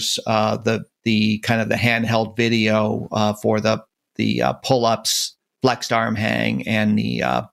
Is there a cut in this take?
no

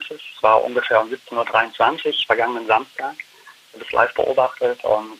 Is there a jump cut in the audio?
no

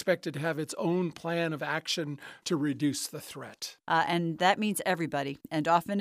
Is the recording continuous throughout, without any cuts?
no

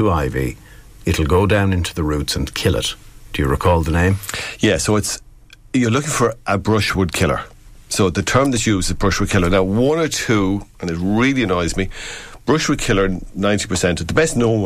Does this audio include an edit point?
no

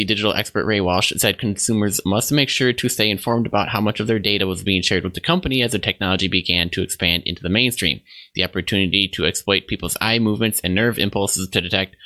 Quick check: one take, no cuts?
yes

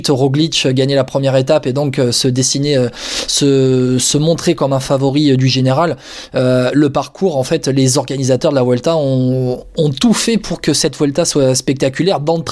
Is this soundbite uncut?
yes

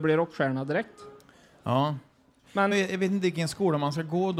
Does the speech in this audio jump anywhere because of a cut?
yes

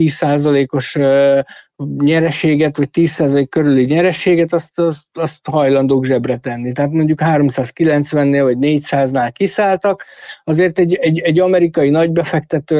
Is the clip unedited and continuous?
yes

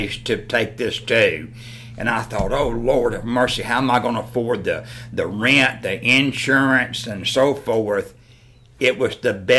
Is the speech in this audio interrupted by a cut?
no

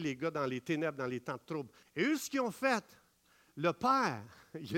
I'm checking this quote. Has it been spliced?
yes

